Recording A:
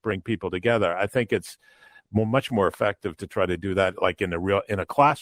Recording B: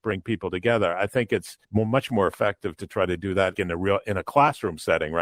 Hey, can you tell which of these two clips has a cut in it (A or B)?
B